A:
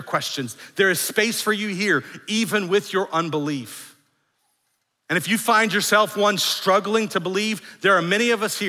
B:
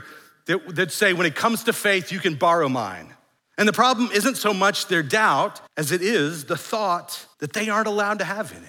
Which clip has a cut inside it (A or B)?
B